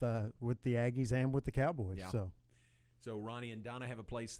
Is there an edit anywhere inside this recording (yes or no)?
no